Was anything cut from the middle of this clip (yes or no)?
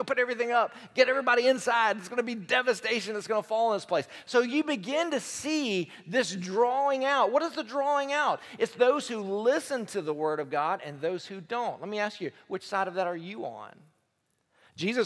no